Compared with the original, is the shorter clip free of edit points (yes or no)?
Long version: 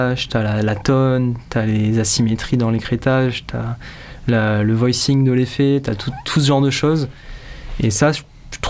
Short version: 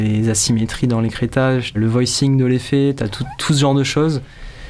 no